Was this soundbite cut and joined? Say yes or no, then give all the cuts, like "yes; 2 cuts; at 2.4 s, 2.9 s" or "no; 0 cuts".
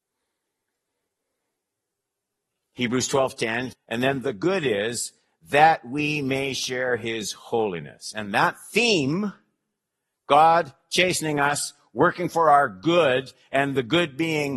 yes; 1 cut; at 3.7 s